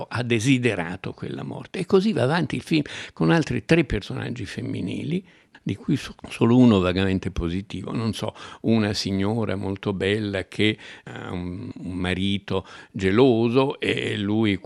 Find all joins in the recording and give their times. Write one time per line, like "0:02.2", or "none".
none